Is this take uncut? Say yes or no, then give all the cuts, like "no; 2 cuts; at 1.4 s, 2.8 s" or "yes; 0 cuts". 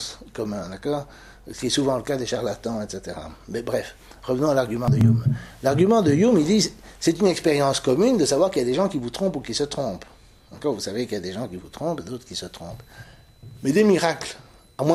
yes; 0 cuts